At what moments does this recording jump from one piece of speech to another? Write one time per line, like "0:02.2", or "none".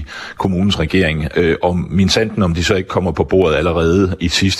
0:01.3